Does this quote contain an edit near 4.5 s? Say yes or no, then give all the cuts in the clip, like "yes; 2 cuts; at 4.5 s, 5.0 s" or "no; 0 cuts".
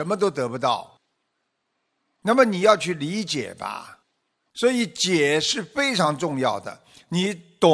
no; 1 cut; at 2.2 s